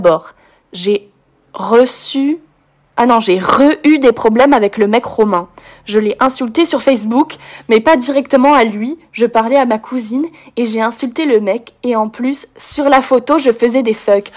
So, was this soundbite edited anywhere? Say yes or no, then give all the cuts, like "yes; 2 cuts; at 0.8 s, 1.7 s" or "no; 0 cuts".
no; 0 cuts